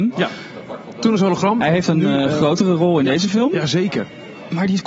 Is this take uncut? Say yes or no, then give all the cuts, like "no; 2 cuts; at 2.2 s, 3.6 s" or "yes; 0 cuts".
yes; 0 cuts